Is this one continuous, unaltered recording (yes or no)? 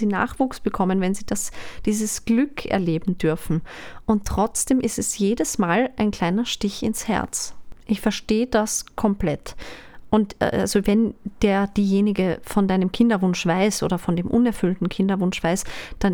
yes